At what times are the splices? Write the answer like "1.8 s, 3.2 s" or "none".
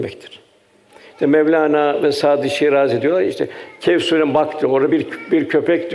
none